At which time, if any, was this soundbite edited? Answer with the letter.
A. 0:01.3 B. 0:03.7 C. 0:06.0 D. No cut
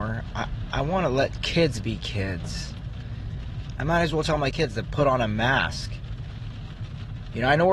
B